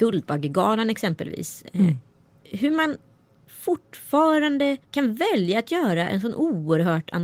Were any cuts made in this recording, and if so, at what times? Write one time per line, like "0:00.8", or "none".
0:04.8

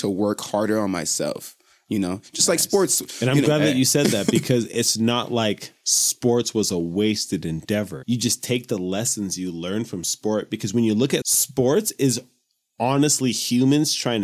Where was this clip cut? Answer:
0:08.0
0:11.2

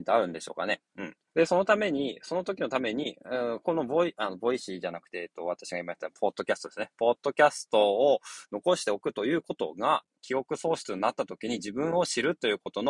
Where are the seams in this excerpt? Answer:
0:01.3
0:10.2

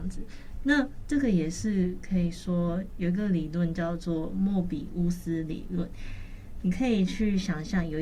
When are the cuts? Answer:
none

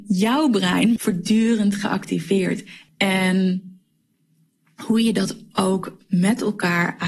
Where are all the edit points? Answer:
0:01.0
0:02.9

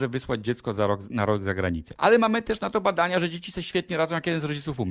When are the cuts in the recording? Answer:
0:02.0

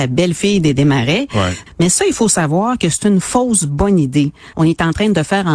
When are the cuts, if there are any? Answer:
0:01.7
0:04.5

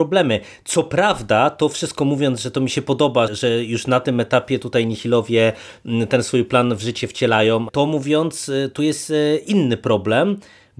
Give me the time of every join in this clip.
0:03.3
0:07.7

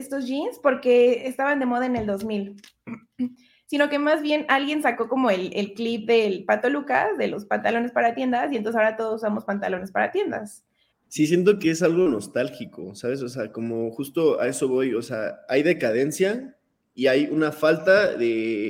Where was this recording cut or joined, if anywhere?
0:10.9

